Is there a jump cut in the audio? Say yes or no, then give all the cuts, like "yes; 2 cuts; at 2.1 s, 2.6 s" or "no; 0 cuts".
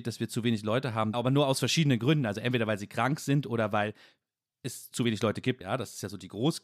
yes; 2 cuts; at 1.1 s, 5.6 s